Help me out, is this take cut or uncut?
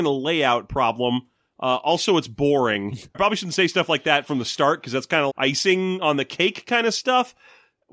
cut